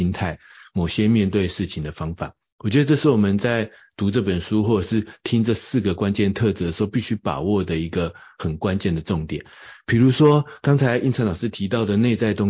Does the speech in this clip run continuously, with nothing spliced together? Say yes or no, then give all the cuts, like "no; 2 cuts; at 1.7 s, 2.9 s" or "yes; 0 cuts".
yes; 0 cuts